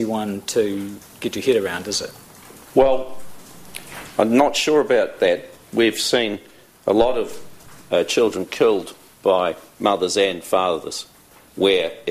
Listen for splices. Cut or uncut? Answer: uncut